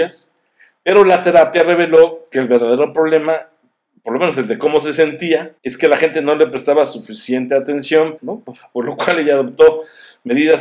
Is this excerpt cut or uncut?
cut